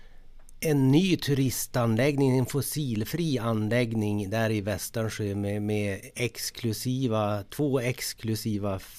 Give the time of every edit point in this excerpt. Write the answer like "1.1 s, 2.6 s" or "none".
none